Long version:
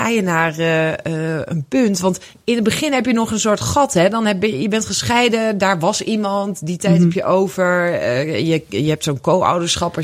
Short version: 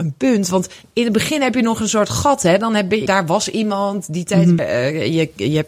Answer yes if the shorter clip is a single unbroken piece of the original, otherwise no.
no